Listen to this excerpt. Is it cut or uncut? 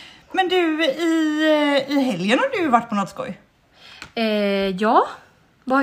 uncut